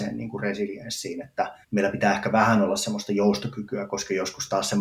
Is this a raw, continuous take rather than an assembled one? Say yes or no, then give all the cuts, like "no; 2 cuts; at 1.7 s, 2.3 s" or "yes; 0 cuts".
no; 1 cut; at 1.6 s